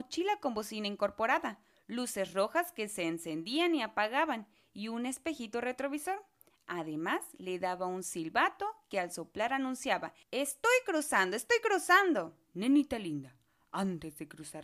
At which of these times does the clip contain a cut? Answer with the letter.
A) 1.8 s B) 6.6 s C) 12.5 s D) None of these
C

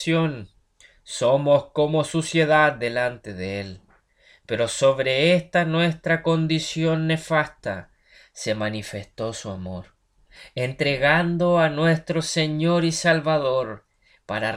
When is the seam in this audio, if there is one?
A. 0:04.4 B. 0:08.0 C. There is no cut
C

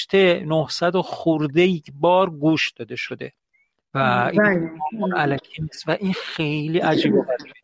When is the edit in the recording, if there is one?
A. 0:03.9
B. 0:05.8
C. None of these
C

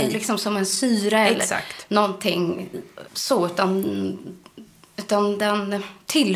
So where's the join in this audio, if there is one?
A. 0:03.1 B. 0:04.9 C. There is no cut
A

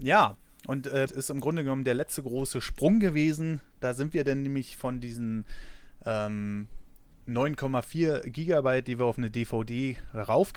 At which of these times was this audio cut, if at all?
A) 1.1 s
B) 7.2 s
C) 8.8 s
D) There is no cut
A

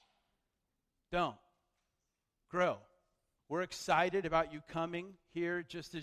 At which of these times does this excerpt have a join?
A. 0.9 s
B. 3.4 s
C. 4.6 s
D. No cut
B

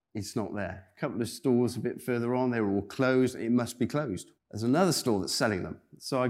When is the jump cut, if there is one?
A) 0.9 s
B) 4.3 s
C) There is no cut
B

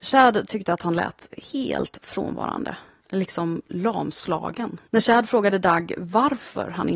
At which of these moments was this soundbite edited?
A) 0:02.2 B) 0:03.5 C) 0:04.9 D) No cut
C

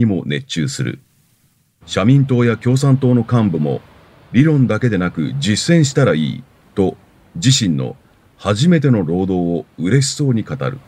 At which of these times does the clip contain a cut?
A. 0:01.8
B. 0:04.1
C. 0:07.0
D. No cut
A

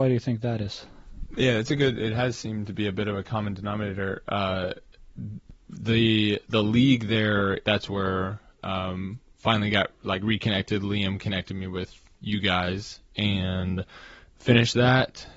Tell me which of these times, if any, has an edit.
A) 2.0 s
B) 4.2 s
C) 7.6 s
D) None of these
C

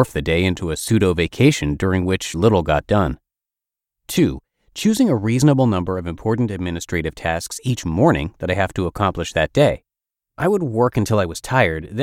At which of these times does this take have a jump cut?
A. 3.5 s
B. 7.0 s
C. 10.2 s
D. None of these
C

